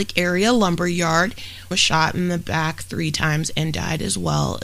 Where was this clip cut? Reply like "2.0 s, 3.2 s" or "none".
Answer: 1.7 s